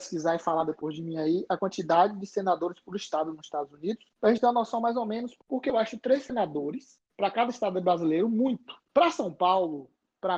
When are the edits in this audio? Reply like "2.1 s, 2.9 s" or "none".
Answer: none